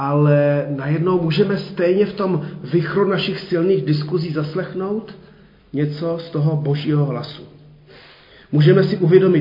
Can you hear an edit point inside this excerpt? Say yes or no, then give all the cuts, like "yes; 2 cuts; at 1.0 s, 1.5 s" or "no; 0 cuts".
no; 0 cuts